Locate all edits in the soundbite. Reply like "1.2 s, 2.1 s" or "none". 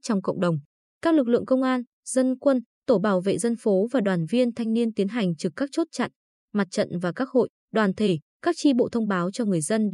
none